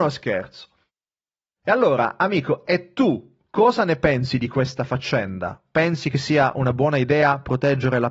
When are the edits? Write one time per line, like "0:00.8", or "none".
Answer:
none